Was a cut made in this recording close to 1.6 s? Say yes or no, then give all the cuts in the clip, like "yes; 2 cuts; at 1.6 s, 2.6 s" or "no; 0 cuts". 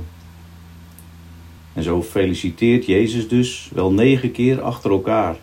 yes; 1 cut; at 1.6 s